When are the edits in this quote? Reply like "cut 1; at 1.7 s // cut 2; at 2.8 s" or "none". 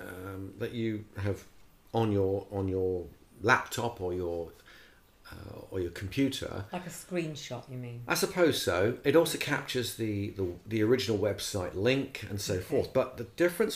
none